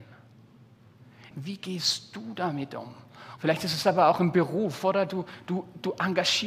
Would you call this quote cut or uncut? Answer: cut